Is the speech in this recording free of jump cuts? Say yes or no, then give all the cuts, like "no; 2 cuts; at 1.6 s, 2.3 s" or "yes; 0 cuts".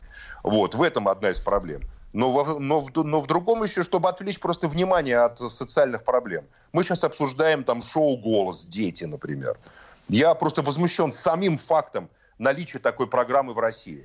yes; 0 cuts